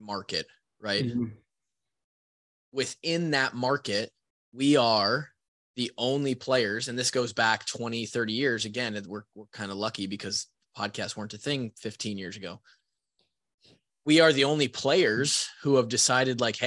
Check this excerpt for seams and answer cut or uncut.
uncut